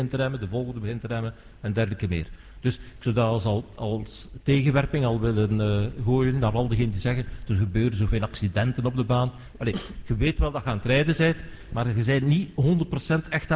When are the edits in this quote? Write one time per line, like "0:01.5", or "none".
0:09.5